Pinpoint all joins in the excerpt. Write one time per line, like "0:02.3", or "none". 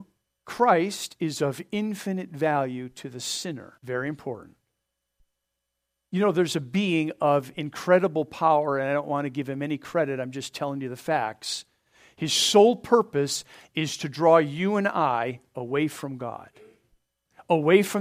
0:03.8